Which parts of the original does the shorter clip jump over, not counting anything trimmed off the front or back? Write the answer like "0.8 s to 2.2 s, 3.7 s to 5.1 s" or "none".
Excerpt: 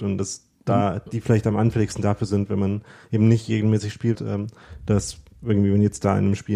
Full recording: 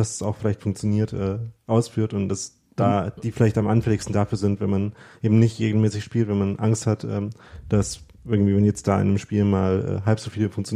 6.3 s to 7.0 s